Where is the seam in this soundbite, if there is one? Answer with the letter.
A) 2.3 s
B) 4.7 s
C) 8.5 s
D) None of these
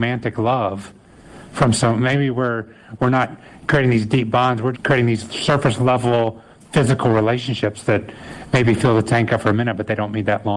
B